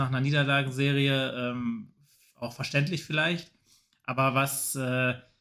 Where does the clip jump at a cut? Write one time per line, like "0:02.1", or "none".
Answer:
none